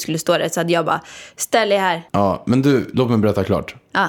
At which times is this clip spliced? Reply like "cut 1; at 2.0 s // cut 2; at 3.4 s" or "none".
cut 1; at 2.1 s